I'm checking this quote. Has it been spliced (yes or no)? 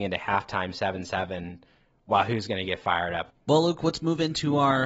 yes